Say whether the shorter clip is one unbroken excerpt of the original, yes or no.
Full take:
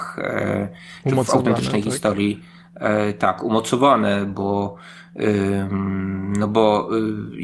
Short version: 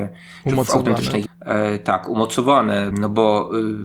no